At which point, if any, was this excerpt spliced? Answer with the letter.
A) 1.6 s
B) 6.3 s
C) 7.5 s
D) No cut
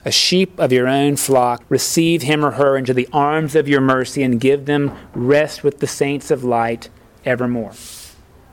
A